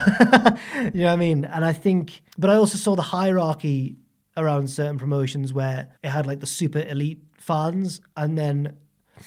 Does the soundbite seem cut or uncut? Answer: cut